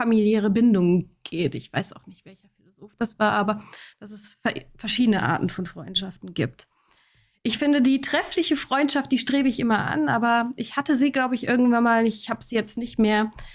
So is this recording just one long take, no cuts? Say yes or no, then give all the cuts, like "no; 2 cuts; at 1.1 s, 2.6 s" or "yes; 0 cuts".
yes; 0 cuts